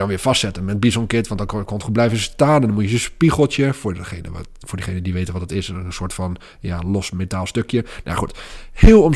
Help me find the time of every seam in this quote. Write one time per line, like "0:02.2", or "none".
none